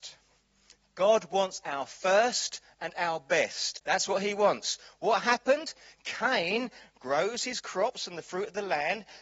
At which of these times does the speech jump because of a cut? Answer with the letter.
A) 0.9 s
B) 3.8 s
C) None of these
C